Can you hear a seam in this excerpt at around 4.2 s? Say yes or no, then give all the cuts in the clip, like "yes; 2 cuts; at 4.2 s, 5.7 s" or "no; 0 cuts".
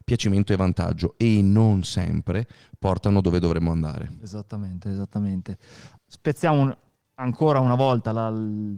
no; 1 cut; at 6.0 s